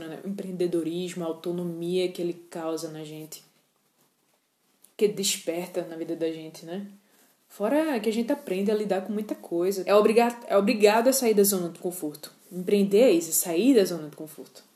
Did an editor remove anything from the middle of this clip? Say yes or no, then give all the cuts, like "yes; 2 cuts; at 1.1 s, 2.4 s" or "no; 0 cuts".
yes; 1 cut; at 9.9 s